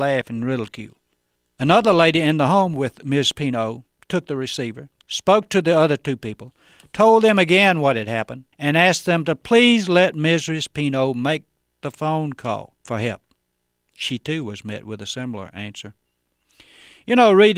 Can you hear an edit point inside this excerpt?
yes; 1 cut; at 8.5 s

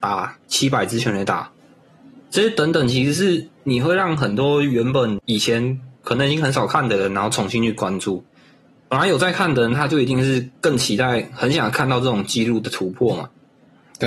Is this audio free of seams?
yes; 0 cuts

